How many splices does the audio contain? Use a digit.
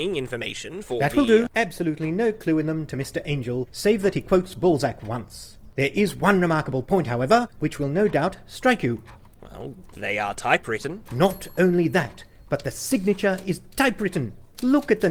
1